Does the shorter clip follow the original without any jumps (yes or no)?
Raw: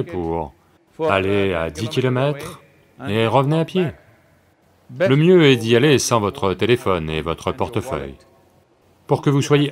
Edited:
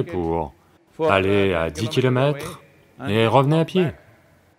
yes